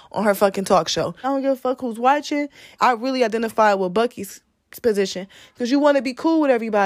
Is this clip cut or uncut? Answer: cut